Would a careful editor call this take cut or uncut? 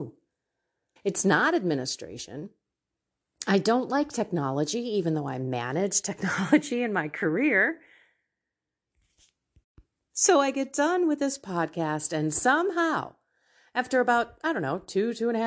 cut